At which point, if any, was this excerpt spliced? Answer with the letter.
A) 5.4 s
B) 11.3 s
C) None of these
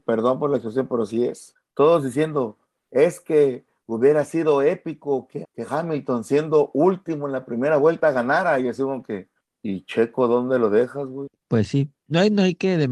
A